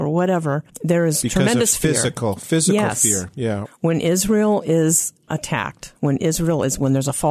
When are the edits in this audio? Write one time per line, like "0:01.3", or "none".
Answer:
0:03.6